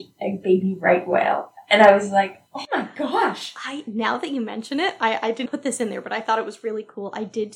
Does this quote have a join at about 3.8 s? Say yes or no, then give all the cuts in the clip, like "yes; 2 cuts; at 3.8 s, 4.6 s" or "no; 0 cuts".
no; 2 cuts; at 2.5 s, 5.4 s